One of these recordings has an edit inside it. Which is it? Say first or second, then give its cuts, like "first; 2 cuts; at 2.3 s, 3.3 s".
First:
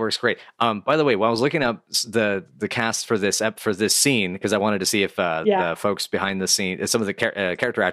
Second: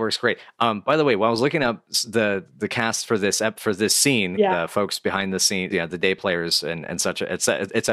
second; 2 cuts; at 4.4 s, 5.7 s